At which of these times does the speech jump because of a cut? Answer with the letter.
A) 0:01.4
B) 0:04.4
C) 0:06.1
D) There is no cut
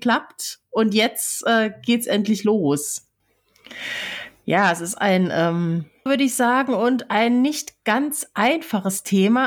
C